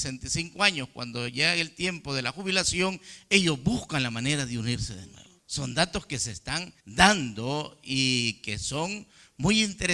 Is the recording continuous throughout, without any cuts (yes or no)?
no